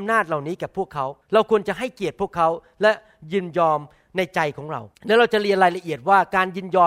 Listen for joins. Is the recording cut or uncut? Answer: cut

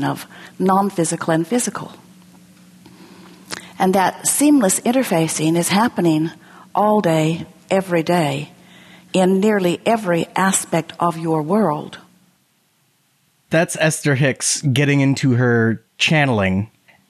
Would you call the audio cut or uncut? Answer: uncut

